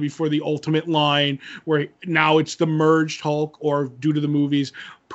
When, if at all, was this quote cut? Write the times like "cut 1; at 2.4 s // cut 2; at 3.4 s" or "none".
none